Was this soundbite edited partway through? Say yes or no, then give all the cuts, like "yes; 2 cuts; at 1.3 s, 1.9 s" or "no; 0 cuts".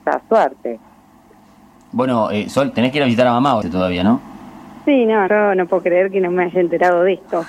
yes; 2 cuts; at 3.6 s, 5.3 s